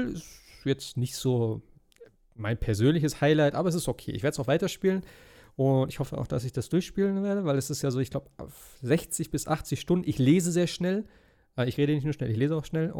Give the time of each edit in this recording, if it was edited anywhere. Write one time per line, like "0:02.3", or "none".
none